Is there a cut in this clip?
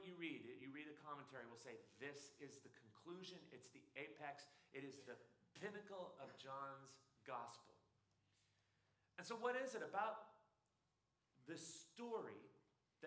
no; 0 cuts

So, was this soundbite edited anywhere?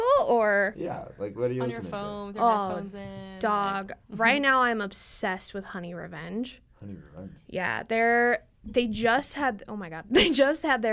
no; 0 cuts

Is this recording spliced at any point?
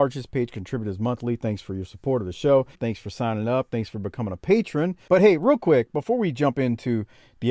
yes; 2 cuts; at 2.7 s, 5.1 s

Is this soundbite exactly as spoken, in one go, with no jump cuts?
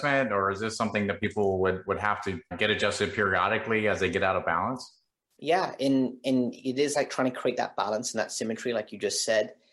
no; 1 cut; at 2.5 s

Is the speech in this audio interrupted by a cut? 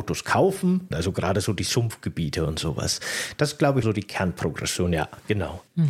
yes; 2 cuts; at 0.9 s, 3.8 s

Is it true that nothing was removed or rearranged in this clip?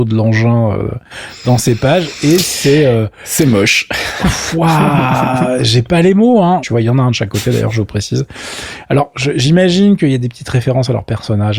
no; 1 cut; at 6.6 s

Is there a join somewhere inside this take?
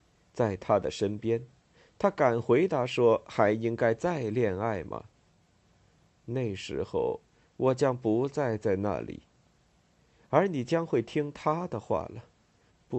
no; 0 cuts

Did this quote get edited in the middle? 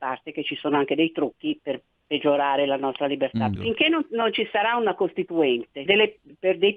yes; 2 cuts; at 3.6 s, 5.9 s

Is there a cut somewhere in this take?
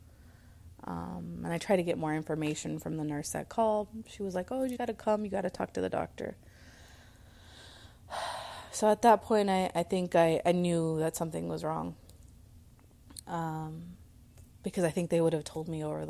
yes; 1 cut; at 4.8 s

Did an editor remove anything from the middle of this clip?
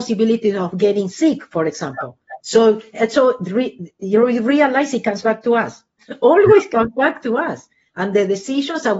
no; 0 cuts

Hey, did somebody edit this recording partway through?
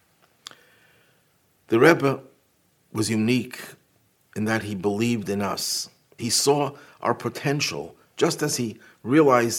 yes; 1 cut; at 6.2 s

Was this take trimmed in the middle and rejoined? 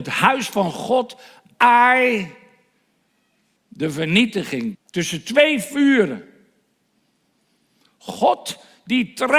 yes; 2 cuts; at 3.6 s, 4.7 s

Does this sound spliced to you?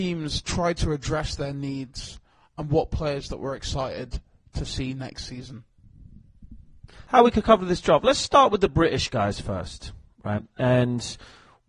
no; 0 cuts

